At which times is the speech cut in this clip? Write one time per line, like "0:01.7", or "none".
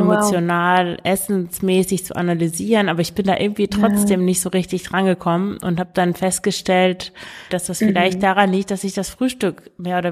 0:07.5